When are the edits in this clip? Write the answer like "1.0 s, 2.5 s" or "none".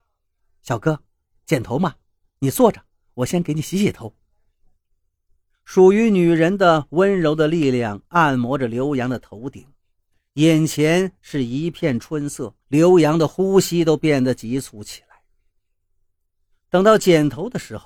5.5 s, 12.6 s